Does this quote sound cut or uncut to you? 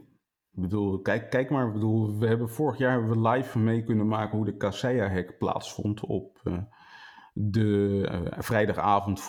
uncut